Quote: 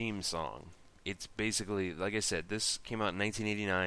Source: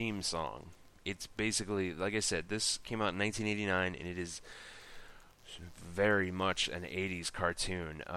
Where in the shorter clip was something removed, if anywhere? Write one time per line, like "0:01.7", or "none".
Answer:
none

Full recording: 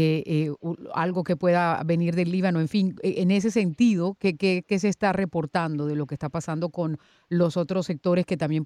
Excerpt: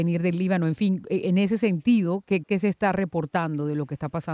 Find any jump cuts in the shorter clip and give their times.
0:02.4

